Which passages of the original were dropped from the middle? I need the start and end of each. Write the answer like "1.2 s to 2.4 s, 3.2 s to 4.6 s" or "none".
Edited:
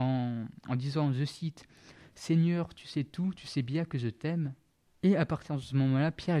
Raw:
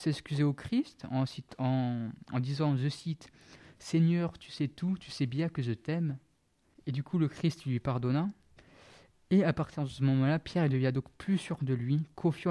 6.5 s to 9.1 s